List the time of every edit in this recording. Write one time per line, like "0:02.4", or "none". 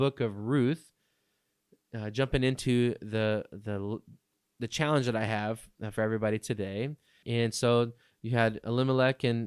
0:07.2